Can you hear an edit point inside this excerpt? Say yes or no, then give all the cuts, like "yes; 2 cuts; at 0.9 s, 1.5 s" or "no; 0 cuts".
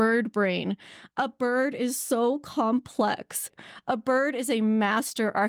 no; 0 cuts